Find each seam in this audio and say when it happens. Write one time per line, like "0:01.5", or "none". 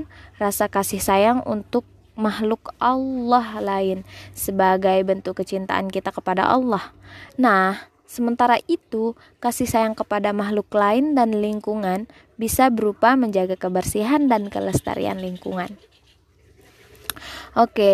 0:07.3